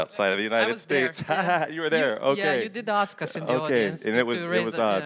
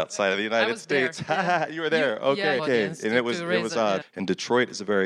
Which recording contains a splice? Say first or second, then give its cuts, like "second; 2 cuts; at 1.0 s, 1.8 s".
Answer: second; 2 cuts; at 2.6 s, 4.0 s